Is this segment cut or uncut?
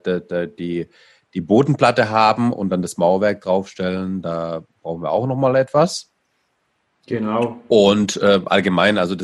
uncut